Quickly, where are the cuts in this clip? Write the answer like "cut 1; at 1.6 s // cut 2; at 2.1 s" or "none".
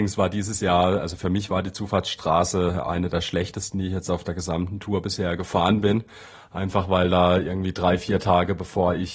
none